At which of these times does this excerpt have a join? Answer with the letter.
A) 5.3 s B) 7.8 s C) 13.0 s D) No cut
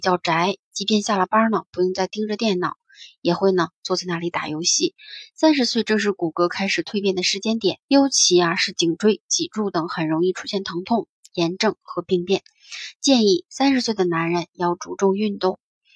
B